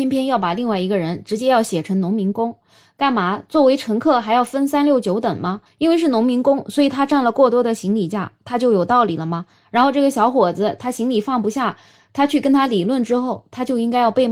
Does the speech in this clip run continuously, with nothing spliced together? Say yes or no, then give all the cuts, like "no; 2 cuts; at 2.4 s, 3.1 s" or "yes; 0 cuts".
yes; 0 cuts